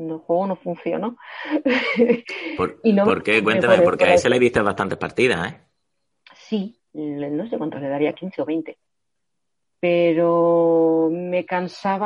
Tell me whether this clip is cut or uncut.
uncut